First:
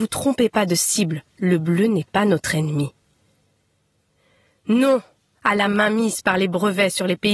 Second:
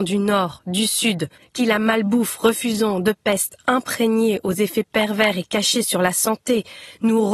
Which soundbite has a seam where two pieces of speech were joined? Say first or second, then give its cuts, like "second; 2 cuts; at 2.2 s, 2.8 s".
second; 1 cut; at 1.4 s